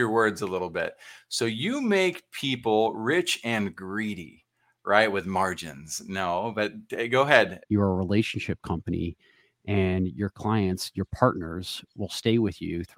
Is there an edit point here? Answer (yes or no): yes